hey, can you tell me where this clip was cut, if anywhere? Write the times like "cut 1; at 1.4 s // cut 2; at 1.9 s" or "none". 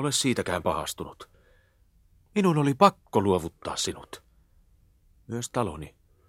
none